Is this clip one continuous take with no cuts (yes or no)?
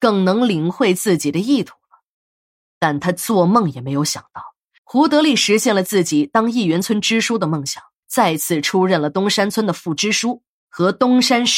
no